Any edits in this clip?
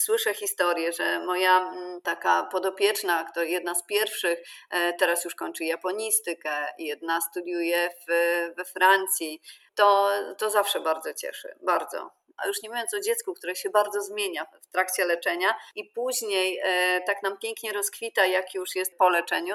yes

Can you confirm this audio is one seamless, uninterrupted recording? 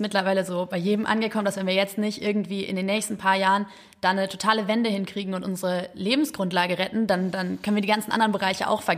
yes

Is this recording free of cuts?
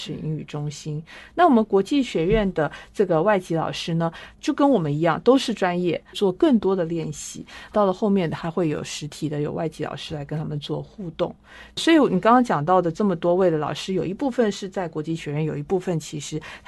no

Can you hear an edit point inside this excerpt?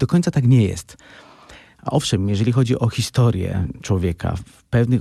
no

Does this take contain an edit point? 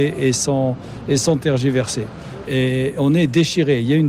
yes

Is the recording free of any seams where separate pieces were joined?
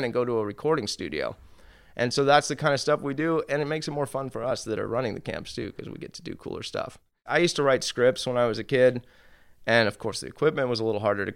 yes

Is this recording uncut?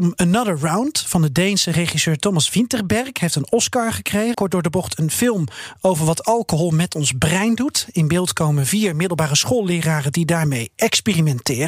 no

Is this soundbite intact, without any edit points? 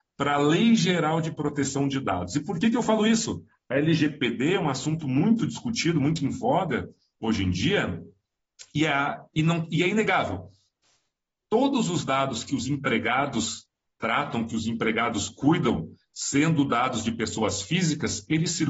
yes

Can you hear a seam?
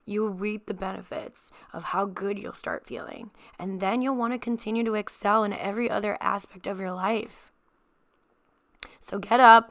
no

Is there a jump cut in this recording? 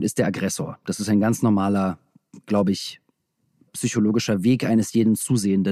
yes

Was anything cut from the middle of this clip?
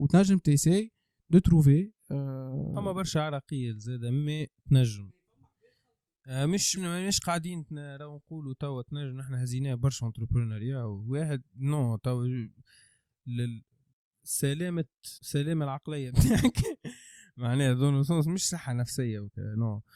yes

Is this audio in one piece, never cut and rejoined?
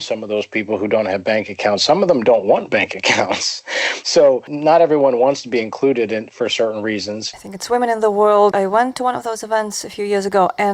no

